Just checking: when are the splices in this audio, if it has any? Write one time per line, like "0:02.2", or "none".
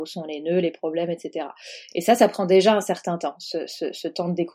none